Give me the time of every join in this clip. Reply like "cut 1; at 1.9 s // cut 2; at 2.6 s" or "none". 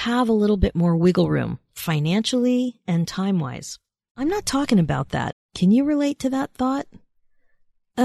cut 1; at 4.1 s // cut 2; at 5.3 s